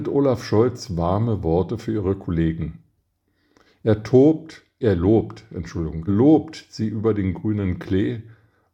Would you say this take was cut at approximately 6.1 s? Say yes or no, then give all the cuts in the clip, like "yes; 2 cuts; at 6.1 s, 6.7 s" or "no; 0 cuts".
yes; 1 cut; at 6.1 s